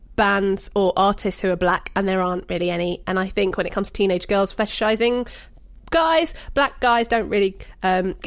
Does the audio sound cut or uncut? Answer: uncut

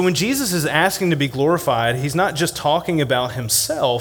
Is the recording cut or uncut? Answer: uncut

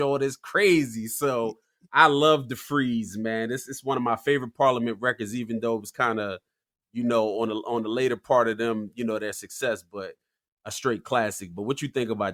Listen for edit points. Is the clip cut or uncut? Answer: uncut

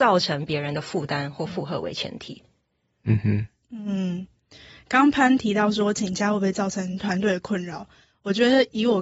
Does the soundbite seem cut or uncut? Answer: uncut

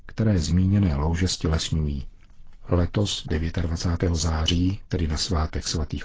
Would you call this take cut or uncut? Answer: uncut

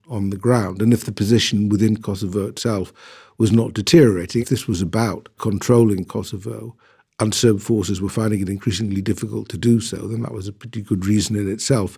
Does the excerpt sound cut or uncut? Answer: cut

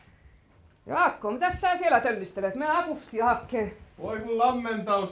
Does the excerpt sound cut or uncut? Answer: uncut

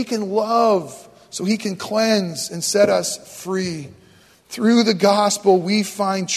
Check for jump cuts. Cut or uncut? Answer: uncut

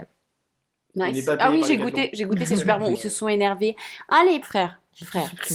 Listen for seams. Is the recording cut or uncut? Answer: cut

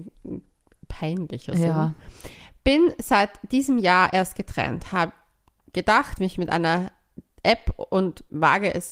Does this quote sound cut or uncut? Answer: cut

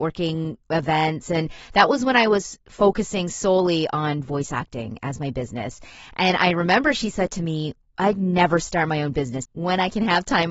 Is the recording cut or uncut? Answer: cut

